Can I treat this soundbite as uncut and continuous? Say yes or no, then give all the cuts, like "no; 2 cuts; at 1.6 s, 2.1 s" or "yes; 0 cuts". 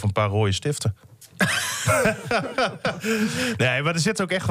yes; 0 cuts